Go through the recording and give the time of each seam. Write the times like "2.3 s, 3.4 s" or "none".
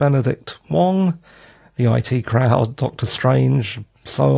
none